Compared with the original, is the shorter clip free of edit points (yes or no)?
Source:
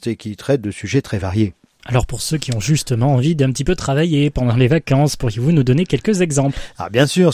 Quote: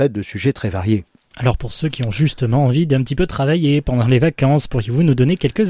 yes